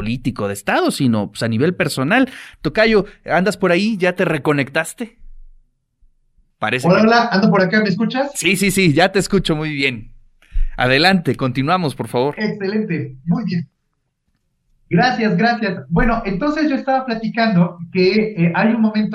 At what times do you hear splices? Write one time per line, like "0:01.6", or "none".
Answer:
none